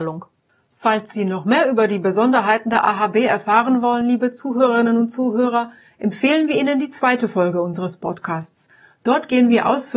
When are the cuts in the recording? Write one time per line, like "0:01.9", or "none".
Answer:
none